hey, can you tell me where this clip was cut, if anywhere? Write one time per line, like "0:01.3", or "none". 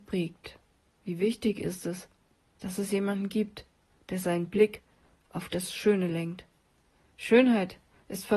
none